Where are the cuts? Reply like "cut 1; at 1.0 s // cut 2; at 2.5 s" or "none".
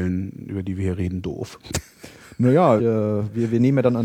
cut 1; at 2.8 s